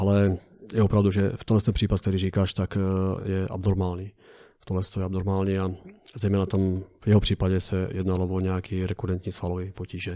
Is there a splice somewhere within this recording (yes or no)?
yes